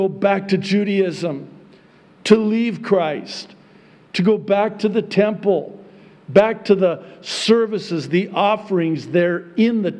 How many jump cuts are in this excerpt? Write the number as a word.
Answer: zero